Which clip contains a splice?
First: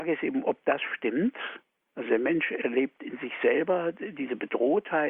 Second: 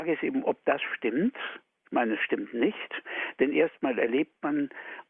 first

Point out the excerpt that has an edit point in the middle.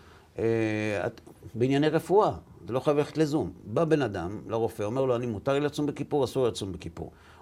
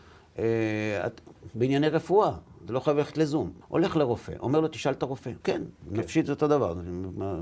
second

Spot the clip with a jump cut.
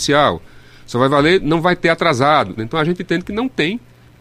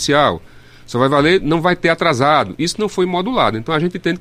first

